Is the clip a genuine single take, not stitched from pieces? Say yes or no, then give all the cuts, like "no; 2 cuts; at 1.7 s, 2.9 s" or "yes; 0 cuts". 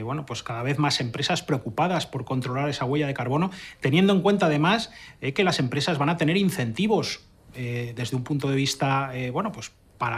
yes; 0 cuts